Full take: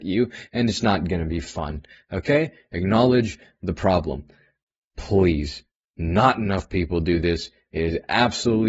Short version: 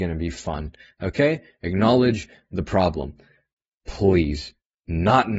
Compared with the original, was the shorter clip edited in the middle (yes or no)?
no